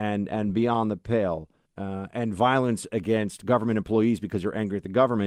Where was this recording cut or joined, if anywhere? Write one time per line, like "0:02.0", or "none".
0:01.7